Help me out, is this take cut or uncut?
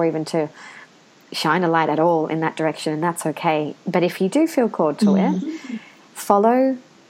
uncut